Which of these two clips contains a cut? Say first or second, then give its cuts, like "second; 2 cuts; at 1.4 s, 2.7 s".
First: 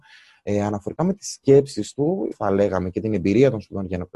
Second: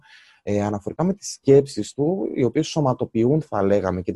first; 1 cut; at 2.3 s